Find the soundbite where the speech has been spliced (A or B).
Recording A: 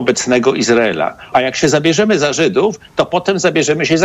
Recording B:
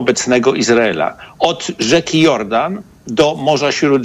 A